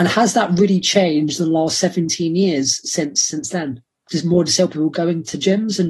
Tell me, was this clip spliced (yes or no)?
no